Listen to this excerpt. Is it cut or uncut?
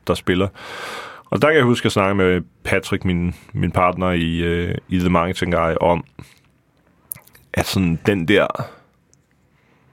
uncut